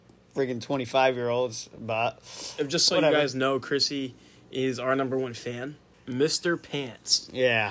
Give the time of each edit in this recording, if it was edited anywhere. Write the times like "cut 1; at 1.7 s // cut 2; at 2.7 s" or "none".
cut 1; at 5.9 s